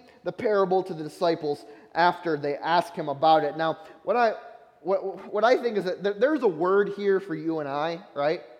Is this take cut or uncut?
uncut